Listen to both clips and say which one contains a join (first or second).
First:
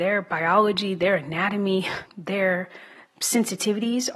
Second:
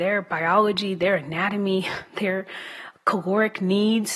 first